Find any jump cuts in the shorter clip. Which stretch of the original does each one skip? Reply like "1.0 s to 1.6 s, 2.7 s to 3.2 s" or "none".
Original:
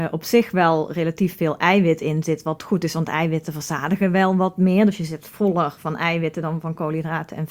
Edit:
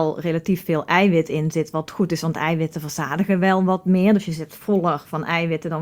none